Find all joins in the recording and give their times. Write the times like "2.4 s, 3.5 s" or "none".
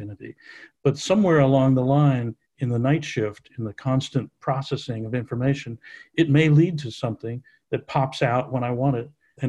none